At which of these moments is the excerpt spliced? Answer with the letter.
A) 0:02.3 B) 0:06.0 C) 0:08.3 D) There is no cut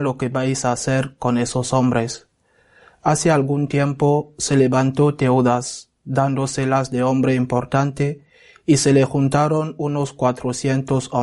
D